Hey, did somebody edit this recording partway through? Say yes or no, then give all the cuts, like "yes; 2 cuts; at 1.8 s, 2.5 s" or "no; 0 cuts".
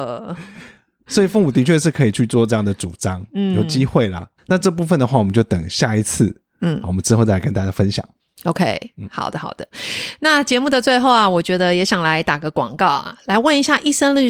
yes; 1 cut; at 4.5 s